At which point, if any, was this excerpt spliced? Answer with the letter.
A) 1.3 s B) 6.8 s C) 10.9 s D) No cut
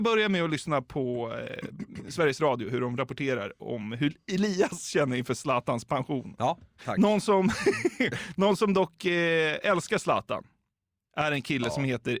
B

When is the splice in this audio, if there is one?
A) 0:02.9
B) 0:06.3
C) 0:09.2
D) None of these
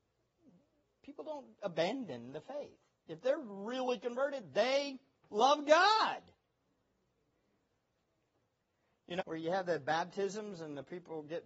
C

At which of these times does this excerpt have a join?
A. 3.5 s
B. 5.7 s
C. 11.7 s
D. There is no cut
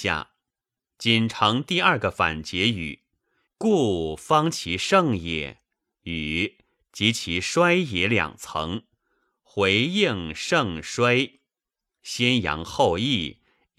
A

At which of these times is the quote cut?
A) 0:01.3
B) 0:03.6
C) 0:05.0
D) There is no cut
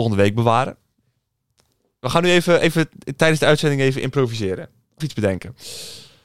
C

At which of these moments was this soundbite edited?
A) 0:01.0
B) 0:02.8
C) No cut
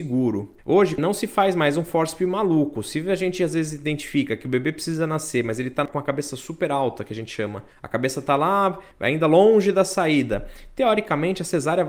A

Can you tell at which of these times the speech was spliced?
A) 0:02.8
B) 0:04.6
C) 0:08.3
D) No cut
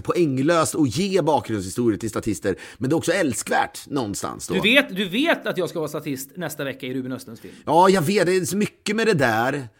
D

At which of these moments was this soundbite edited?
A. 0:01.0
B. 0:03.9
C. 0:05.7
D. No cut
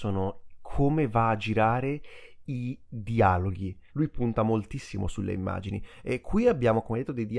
B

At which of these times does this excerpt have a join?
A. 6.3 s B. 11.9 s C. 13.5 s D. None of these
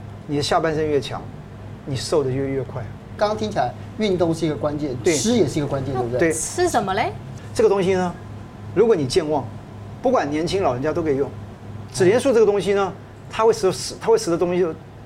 B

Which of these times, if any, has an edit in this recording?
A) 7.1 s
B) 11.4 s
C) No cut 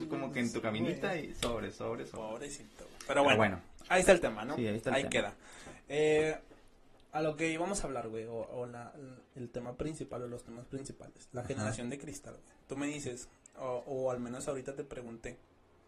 A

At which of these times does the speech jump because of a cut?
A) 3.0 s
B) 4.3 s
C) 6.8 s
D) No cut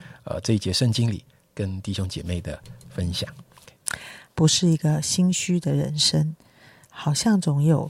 B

